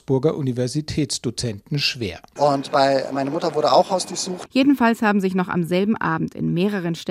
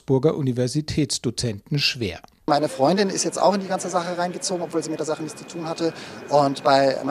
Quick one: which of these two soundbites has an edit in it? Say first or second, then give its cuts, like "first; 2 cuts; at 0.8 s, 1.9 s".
first; 2 cuts; at 2.4 s, 4.5 s